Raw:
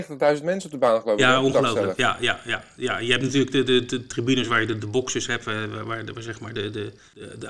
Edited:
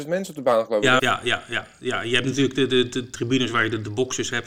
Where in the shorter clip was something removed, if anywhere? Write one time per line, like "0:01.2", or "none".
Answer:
0:01.0